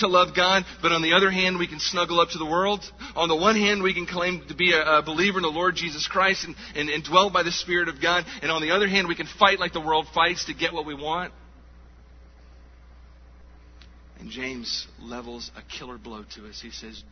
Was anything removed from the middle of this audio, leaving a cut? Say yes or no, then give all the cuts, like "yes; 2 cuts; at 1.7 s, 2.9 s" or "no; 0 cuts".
no; 0 cuts